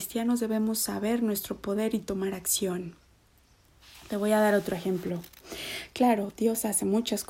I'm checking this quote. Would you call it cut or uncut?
uncut